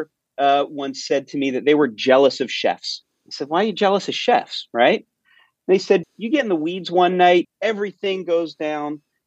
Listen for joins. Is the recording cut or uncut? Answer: cut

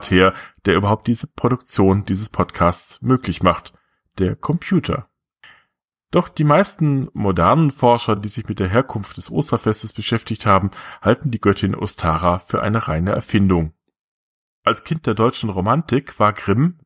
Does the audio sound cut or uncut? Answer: uncut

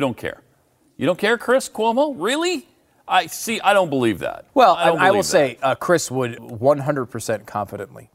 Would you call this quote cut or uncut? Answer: cut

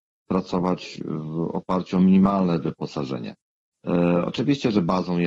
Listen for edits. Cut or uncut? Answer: uncut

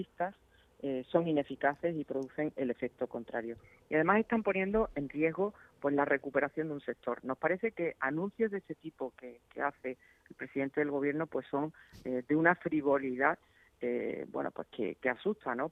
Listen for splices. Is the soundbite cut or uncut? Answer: uncut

